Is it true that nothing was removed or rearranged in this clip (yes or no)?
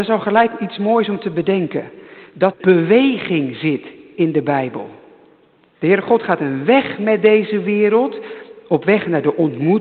no